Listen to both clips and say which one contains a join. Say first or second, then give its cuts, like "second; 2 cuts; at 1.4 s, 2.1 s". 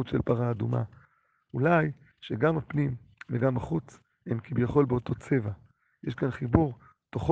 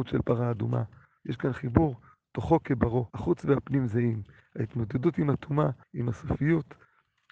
second; 3 cuts; at 1.2 s, 3.1 s, 5.8 s